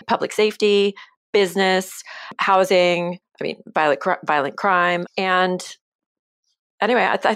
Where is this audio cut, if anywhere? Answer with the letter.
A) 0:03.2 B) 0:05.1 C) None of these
A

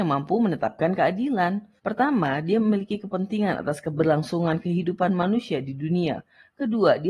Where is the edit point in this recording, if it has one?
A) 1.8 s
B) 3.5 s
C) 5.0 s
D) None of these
A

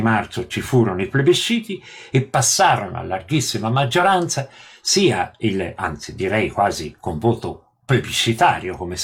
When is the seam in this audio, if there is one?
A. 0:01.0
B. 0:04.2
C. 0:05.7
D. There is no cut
D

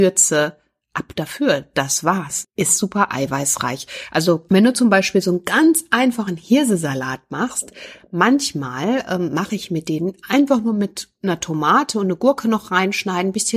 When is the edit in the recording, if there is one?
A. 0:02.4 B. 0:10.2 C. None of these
A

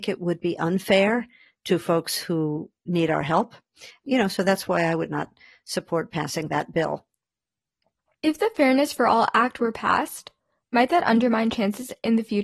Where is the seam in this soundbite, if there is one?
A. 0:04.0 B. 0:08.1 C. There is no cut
C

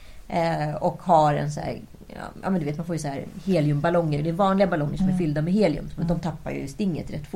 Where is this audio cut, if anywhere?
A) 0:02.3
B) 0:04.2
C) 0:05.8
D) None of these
B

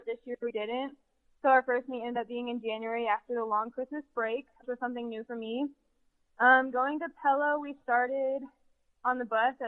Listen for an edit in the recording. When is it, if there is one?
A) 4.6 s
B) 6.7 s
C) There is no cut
A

